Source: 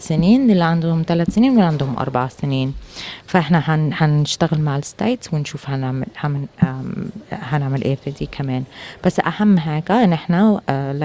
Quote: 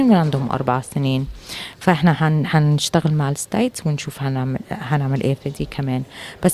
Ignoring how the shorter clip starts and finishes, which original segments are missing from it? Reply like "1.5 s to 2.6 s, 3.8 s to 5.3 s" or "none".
6.1 s to 7.2 s